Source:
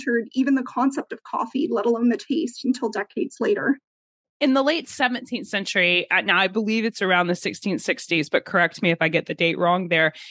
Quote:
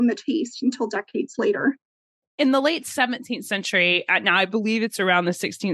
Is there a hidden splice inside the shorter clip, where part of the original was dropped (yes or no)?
no